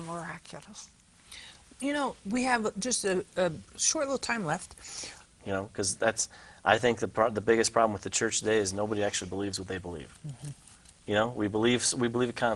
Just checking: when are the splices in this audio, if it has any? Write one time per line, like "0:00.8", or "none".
0:05.3